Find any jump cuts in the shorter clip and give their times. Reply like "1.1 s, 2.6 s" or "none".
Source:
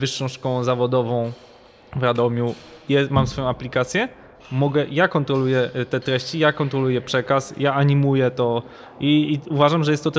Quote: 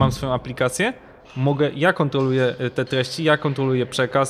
none